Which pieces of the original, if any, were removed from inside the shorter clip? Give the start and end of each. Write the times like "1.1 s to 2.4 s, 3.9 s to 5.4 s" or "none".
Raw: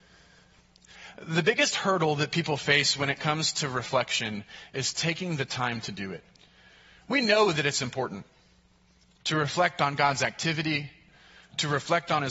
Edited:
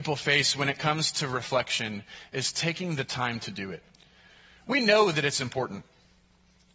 none